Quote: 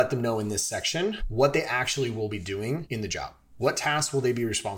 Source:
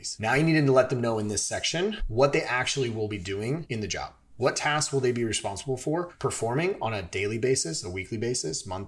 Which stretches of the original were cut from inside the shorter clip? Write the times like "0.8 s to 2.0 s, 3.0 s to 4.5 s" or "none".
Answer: none